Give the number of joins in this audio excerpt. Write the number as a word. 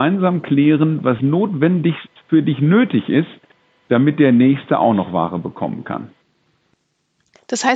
one